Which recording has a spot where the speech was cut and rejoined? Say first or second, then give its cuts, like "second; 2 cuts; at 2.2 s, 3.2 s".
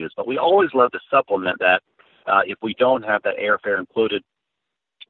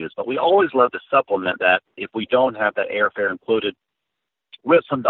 second; 1 cut; at 2.0 s